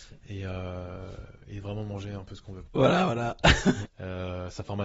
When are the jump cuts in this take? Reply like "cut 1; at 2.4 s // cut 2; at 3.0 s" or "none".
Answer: cut 1; at 2.6 s // cut 2; at 3.8 s